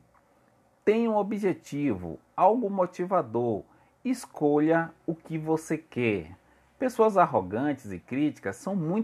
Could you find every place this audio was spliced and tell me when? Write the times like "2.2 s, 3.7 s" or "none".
none